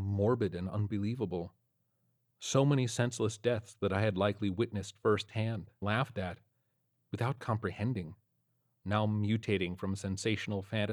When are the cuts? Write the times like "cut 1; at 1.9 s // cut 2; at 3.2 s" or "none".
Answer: cut 1; at 5.8 s